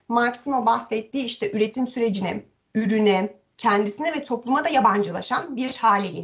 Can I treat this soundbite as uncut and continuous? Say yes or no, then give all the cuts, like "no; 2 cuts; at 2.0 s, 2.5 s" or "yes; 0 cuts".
yes; 0 cuts